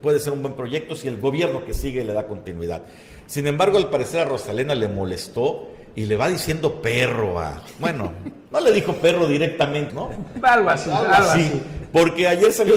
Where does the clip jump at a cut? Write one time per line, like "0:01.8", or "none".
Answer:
0:08.5
0:09.9

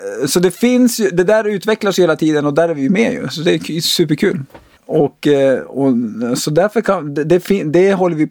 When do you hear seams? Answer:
0:04.8

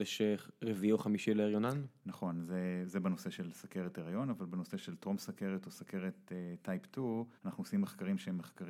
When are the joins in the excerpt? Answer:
0:07.4

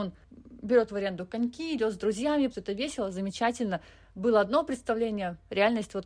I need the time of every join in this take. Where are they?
0:02.5

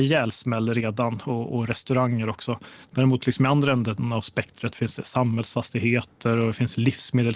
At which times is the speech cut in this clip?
none

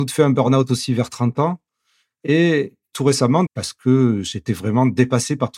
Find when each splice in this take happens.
0:03.5

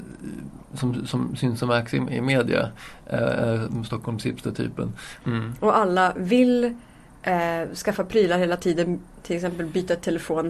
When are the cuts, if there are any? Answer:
0:05.2

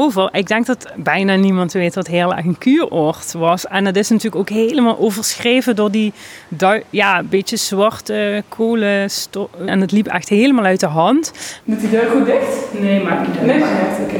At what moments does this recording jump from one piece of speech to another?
0:09.7
0:11.6

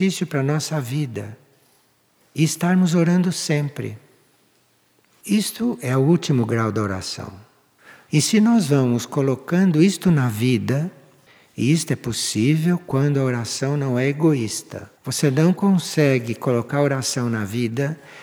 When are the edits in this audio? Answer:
0:08.1
0:15.0

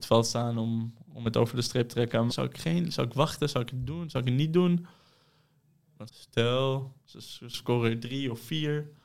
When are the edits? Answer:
0:02.3
0:06.1

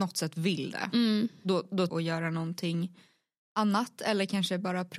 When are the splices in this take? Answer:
0:01.9

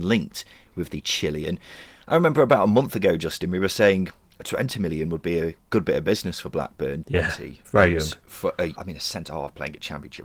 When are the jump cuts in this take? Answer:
0:07.0
0:08.8

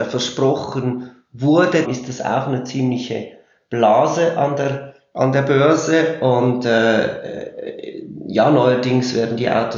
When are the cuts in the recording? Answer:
0:01.8

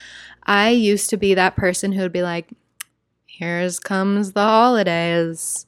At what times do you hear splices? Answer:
none

